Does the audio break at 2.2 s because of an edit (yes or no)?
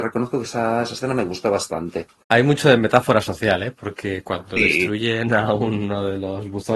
yes